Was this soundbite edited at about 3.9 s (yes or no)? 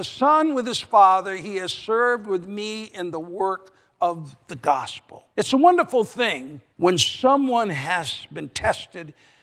no